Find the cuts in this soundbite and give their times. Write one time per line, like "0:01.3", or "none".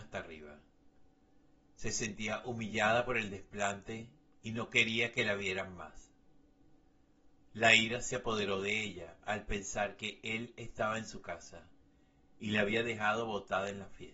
0:07.5